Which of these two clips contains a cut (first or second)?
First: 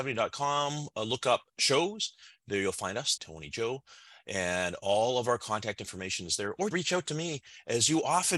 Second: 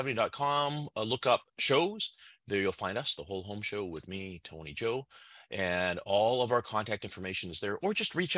first